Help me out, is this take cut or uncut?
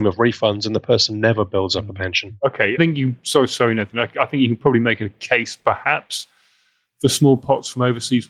cut